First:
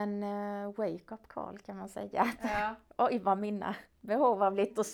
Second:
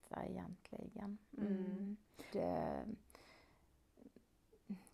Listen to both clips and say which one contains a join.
second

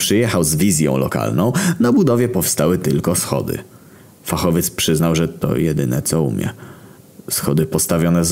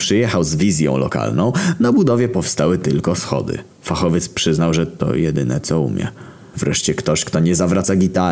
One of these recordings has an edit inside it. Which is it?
second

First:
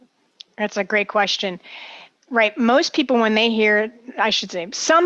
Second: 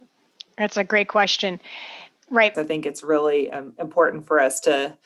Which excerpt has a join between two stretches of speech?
second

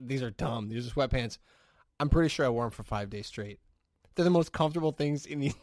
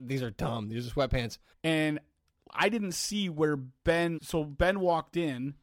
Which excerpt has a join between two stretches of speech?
second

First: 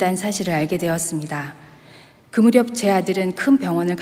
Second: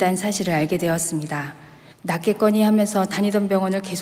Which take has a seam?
second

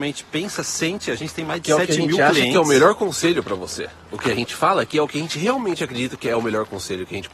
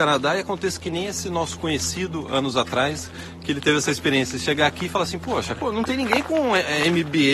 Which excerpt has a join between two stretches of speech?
second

